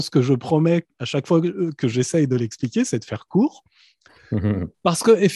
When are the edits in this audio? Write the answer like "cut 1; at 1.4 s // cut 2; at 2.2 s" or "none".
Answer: none